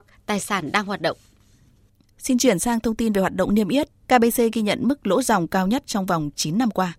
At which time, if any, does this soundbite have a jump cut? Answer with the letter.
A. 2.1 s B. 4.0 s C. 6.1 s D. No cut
B